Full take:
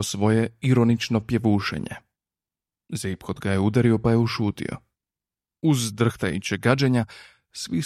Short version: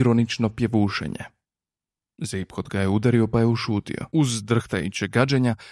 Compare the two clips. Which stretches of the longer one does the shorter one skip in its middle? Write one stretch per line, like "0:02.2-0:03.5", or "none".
0:04.8-0:05.6